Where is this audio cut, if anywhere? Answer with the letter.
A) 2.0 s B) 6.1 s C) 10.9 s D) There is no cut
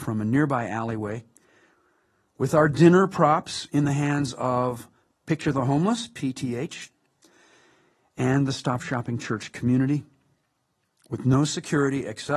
D